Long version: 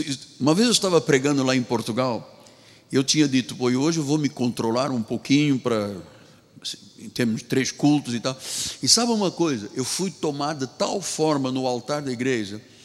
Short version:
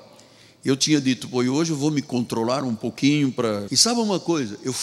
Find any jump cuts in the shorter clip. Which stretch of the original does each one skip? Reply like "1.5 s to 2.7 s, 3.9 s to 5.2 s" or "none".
5.9 s to 8.8 s